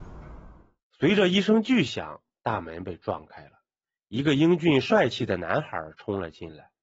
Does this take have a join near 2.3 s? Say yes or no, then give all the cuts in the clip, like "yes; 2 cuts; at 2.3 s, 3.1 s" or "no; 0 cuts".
no; 0 cuts